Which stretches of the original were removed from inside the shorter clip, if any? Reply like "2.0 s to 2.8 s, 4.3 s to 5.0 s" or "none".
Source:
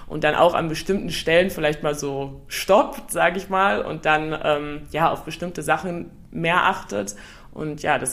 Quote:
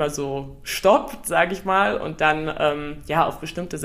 none